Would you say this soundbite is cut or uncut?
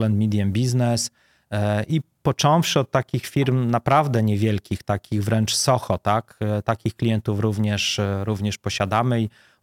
uncut